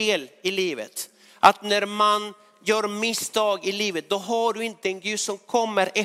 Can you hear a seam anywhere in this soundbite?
no; 0 cuts

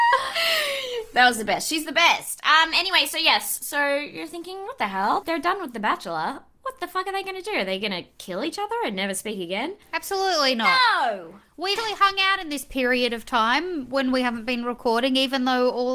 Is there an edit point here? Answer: yes; 3 cuts; at 5.2 s, 9.8 s, 11.8 s

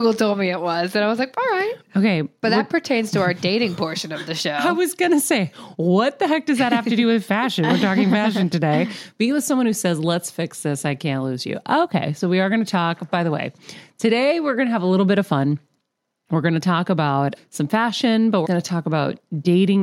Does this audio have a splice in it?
yes; 2 cuts; at 17.4 s, 18.4 s

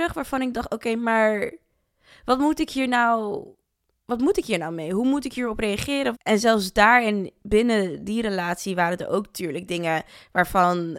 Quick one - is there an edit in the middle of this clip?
yes; 1 cut; at 6.1 s

